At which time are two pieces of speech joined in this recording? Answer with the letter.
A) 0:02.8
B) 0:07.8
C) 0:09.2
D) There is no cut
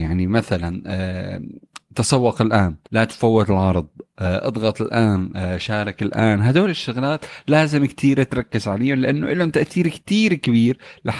A